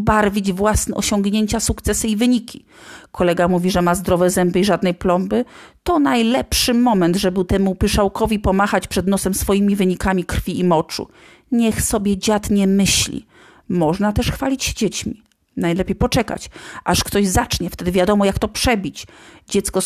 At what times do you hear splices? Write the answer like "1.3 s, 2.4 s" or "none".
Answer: none